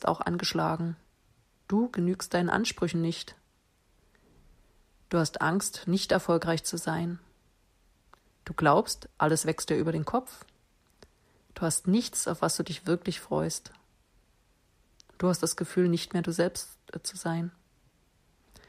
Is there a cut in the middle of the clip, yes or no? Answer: yes